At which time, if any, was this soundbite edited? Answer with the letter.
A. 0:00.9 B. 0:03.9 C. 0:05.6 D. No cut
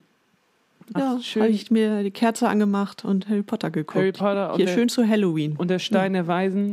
A